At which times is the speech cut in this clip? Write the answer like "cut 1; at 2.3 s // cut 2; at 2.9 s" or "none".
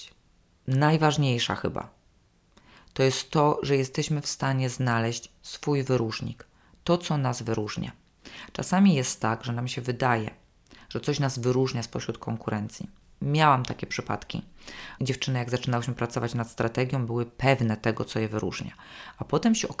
cut 1; at 15.0 s